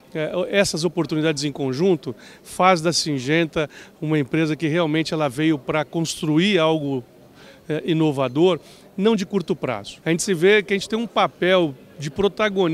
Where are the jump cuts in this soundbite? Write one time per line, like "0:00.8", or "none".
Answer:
0:10.0

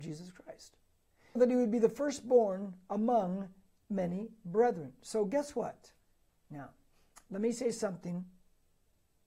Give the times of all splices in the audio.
0:01.4
0:06.3

